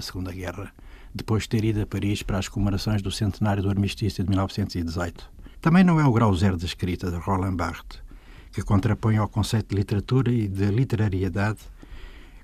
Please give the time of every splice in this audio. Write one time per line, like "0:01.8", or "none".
0:05.5